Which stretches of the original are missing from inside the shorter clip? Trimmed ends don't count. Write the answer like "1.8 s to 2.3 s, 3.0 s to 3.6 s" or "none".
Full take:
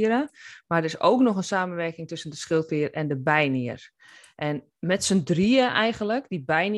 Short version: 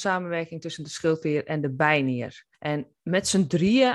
4.0 s to 4.3 s